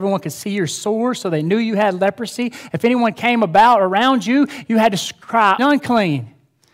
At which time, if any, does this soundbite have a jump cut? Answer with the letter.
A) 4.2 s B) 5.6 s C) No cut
B